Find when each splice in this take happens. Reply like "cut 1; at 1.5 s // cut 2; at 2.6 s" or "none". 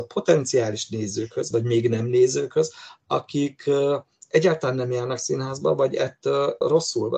cut 1; at 1.5 s